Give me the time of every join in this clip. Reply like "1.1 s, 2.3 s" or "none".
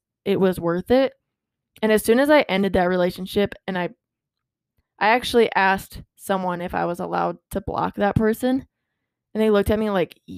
none